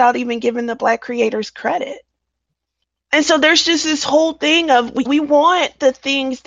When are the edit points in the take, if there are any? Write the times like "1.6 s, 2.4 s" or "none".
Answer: 5.1 s